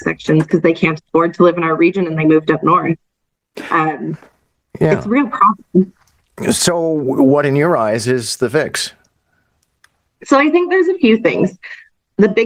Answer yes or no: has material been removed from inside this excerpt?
no